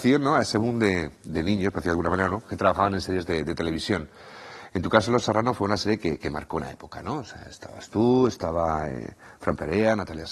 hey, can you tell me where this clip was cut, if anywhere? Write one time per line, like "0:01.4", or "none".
none